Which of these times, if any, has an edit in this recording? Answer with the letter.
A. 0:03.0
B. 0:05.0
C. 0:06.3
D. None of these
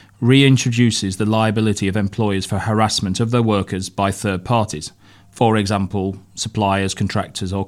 D